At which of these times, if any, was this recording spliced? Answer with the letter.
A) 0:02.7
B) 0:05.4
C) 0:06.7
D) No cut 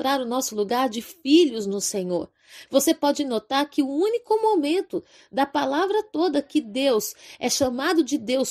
A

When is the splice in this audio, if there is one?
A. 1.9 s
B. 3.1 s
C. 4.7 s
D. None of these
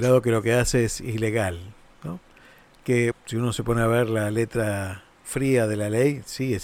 B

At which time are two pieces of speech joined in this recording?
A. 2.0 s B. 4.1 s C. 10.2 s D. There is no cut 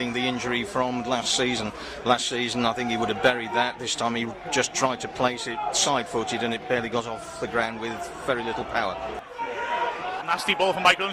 C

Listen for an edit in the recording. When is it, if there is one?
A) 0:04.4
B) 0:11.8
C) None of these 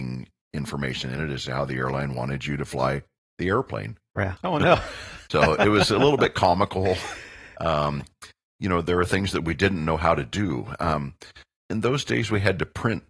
A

